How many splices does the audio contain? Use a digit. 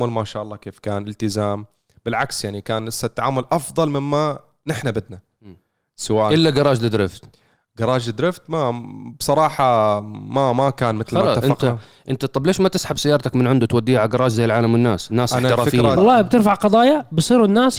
1